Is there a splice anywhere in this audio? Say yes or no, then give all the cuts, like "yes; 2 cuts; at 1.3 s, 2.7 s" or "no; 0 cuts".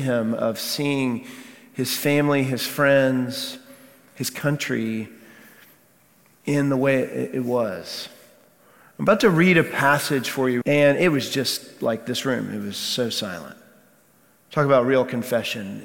yes; 1 cut; at 10.6 s